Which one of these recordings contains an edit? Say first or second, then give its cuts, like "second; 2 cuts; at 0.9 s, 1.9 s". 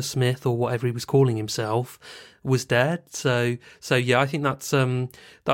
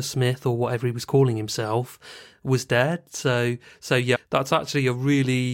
second; 1 cut; at 4.1 s